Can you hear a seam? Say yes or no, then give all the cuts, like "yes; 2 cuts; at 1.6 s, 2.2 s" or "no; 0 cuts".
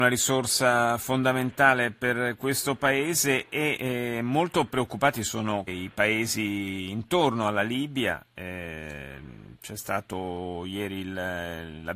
yes; 1 cut; at 5.7 s